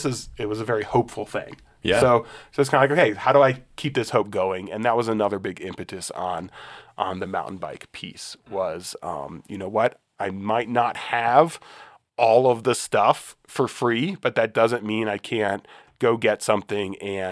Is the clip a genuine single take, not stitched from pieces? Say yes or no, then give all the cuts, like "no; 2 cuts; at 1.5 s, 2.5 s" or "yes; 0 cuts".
yes; 0 cuts